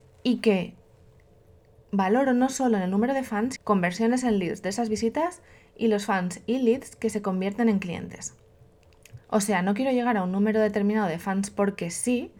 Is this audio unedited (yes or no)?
no